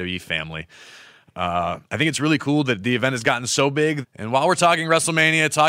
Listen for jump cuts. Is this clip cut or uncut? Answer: cut